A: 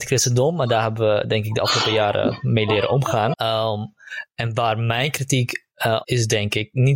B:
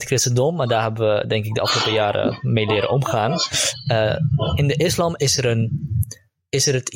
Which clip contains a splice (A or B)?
A